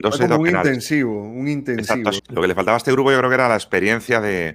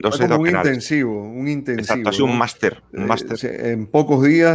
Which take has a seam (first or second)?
first